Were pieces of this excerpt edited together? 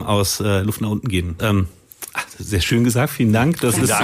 yes; 1 cut; at 1.4 s

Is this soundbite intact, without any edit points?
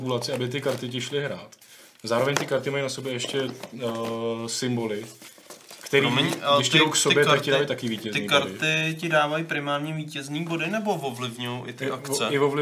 yes; 0 cuts

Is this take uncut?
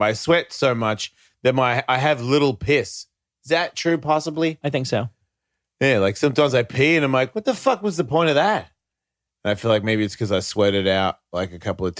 yes; 0 cuts

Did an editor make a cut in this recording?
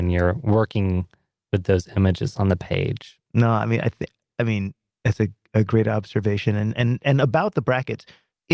no; 0 cuts

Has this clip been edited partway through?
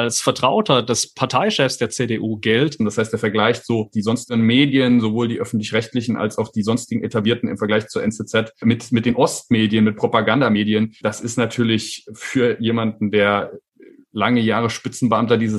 yes; 1 cut; at 2.8 s

